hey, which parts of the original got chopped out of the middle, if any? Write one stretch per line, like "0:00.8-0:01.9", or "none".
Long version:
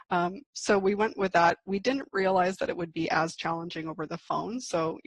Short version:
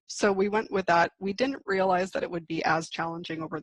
none